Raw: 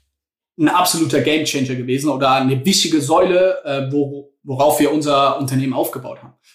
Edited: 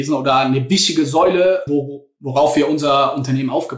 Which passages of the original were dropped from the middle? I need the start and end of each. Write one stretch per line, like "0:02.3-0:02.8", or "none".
0:03.6-0:03.9